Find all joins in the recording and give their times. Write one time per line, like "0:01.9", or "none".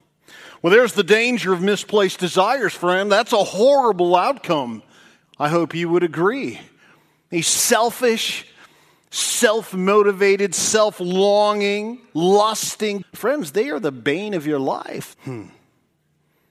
0:13.0
0:15.1